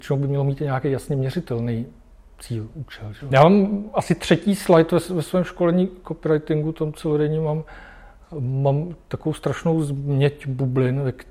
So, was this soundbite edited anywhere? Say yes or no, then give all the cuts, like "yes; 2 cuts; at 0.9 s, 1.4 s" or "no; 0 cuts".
yes; 1 cut; at 3.3 s